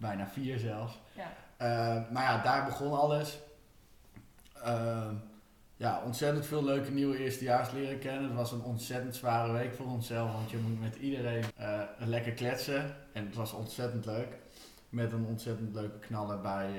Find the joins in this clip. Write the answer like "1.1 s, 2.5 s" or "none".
11.5 s